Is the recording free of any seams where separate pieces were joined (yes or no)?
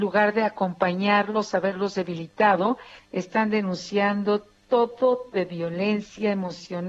no